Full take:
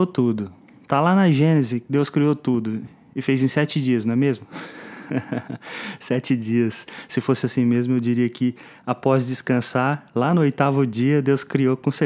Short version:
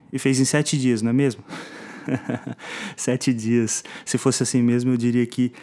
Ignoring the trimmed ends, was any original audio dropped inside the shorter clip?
no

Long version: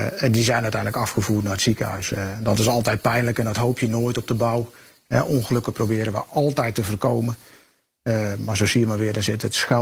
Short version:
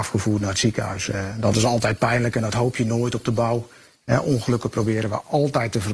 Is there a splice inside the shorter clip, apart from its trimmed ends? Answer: no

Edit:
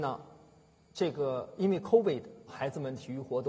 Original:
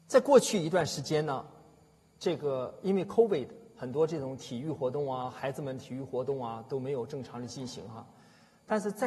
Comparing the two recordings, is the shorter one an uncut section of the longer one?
no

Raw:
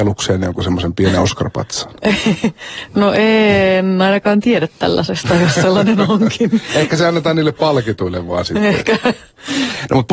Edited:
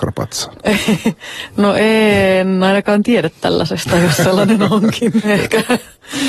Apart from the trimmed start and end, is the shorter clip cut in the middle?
yes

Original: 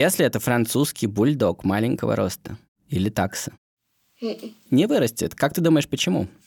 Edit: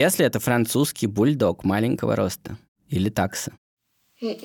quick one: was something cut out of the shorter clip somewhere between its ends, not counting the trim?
no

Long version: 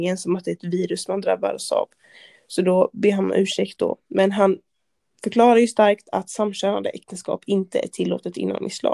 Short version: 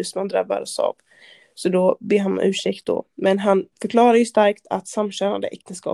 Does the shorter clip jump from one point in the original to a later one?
yes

